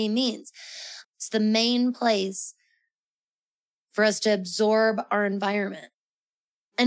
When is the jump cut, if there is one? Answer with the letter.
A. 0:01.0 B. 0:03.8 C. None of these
A